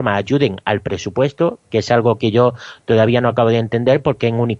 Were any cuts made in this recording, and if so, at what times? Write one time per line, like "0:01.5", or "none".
0:01.7

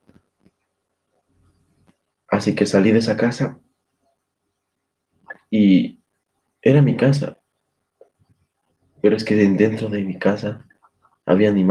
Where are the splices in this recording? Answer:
none

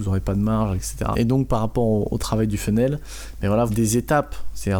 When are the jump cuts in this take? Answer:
0:01.1
0:03.7

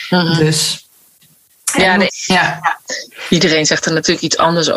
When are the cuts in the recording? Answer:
0:02.1

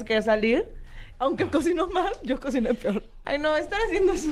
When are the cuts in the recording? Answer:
0:01.1
0:03.2

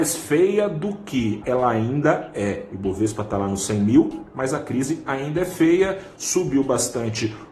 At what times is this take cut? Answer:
0:01.4

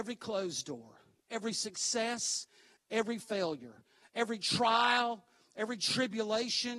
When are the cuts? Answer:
none

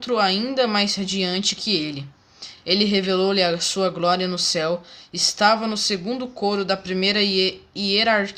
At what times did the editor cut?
none

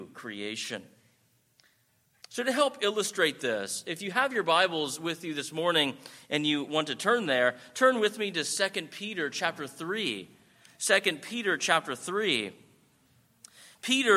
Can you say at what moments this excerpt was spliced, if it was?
none

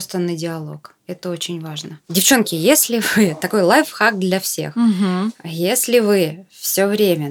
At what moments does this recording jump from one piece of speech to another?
none

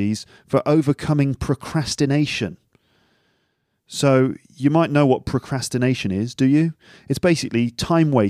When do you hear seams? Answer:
none

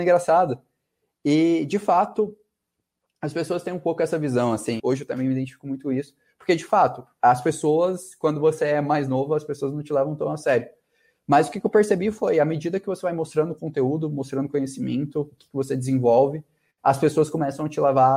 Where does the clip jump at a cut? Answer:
0:04.8

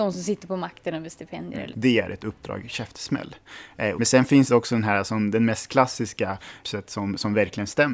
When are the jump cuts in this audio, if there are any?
0:01.7
0:03.9
0:06.6

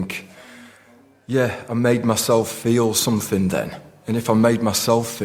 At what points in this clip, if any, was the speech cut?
none

